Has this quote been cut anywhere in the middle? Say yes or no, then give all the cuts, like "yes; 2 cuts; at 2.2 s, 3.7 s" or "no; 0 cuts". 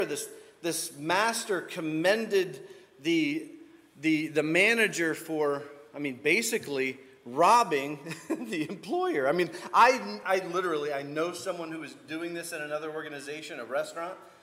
no; 0 cuts